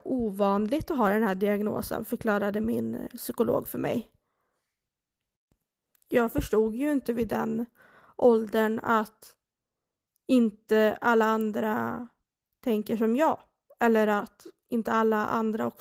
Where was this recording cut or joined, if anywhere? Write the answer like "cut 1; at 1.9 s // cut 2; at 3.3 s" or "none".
none